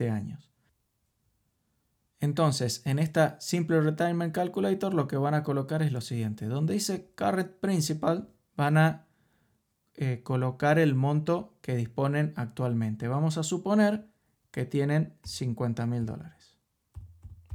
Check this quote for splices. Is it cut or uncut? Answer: uncut